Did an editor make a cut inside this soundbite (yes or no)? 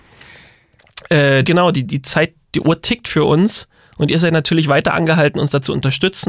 yes